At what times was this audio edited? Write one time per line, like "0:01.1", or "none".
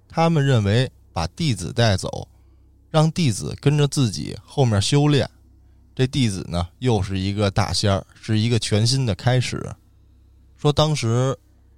none